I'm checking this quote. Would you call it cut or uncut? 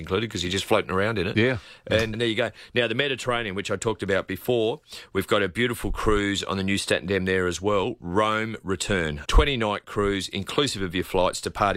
cut